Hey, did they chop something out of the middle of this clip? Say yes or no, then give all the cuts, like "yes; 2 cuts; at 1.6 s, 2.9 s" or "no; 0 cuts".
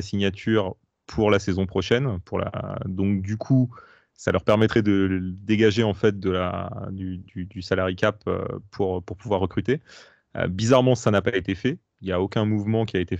no; 0 cuts